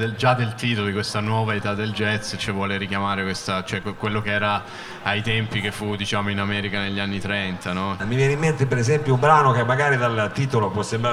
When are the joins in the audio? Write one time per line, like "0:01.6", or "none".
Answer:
0:08.0